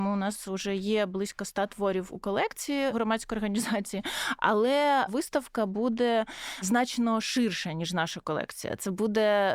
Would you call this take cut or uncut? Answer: uncut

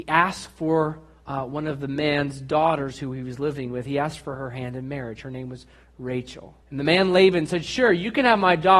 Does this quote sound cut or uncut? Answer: cut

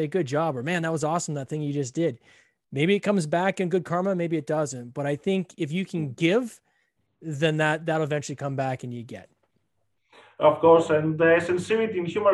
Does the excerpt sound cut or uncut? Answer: uncut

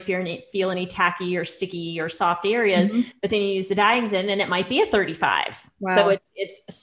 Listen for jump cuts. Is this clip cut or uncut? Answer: uncut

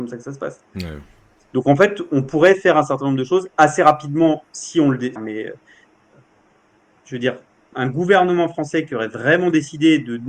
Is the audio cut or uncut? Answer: cut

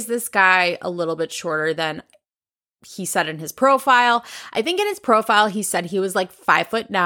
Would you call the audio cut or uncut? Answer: uncut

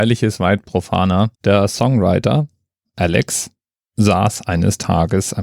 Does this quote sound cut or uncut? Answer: cut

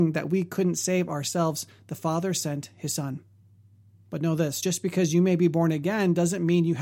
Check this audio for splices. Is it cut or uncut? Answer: uncut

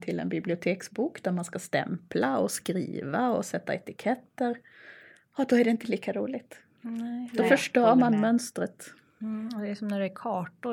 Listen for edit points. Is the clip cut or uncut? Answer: uncut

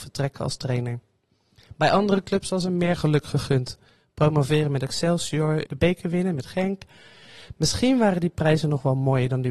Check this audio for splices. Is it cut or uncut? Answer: cut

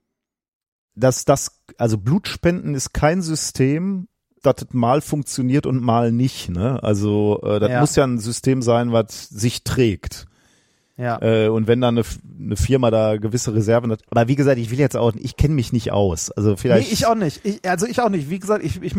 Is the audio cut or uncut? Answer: cut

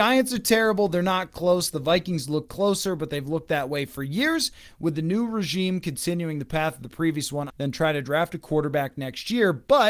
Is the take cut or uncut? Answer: cut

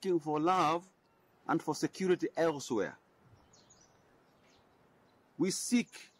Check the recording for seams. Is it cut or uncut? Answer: uncut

